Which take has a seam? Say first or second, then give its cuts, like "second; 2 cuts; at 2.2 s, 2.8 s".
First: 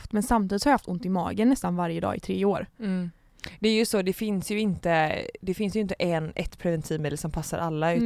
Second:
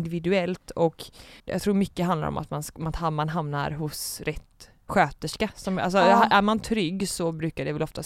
second; 1 cut; at 1.4 s